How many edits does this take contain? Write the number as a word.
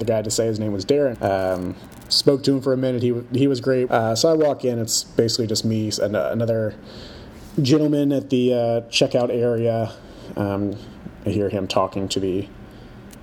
two